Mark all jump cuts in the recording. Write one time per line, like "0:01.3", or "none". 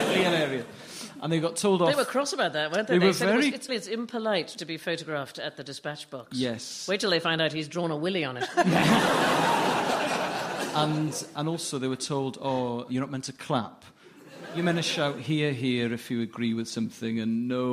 0:03.7